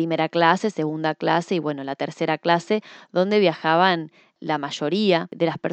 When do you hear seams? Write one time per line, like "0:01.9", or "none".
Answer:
none

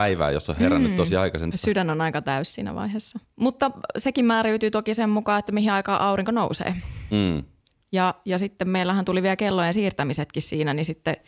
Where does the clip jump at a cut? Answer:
0:01.5

